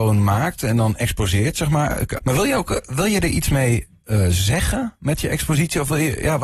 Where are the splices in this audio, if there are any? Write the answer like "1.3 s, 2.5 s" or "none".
2.2 s